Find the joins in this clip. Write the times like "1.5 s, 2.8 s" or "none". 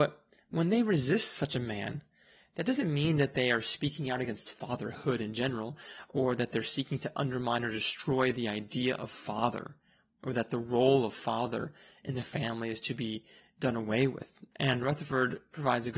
14.5 s